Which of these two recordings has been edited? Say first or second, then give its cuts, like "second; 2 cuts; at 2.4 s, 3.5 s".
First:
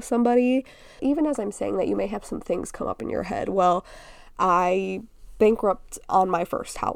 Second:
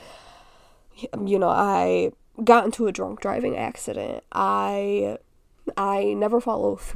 first; 1 cut; at 1.0 s